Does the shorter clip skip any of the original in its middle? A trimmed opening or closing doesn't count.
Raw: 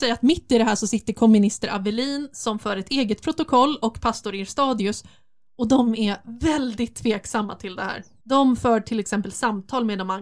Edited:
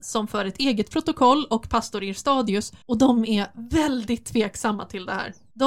yes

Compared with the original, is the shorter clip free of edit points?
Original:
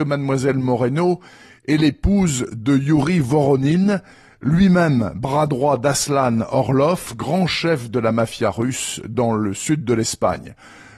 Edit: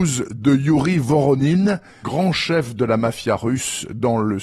no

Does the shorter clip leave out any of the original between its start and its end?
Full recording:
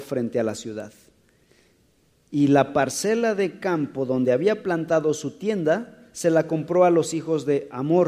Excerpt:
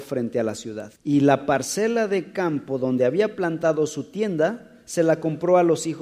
yes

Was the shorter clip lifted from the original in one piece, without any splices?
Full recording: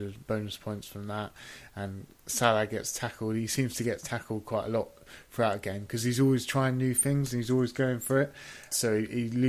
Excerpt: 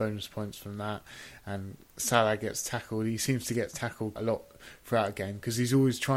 no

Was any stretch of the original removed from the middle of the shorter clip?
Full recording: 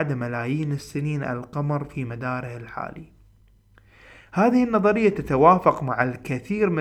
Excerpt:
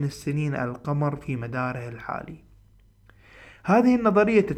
no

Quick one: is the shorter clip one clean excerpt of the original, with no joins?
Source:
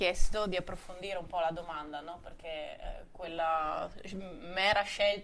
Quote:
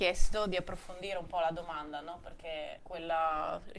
no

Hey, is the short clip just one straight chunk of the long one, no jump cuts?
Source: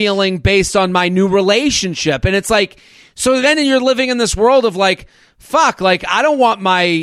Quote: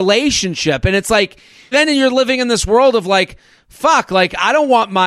no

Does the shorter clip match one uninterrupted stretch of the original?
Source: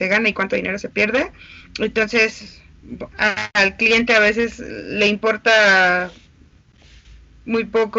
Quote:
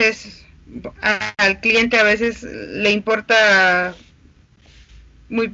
yes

